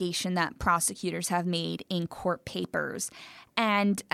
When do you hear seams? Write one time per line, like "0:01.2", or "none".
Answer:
none

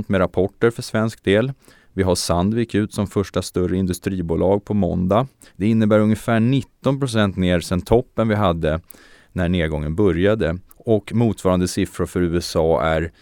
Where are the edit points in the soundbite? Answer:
0:05.5
0:10.7

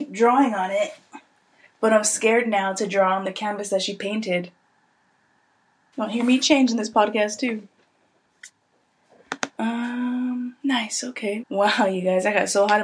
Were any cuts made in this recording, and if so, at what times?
0:05.9
0:11.4

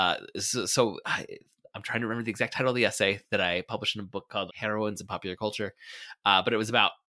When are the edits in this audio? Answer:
0:04.5

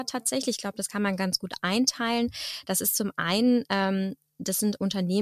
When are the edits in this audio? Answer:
none

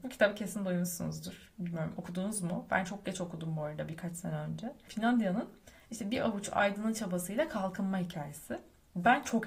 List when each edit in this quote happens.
0:04.9

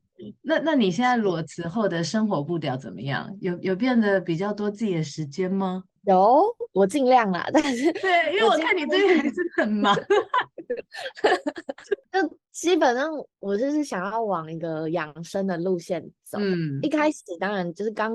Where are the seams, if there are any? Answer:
none

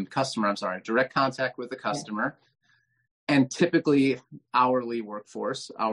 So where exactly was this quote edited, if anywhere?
none

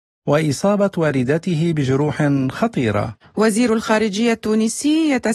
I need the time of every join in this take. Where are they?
none

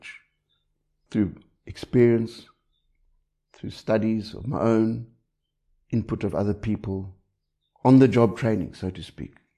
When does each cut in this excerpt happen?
none

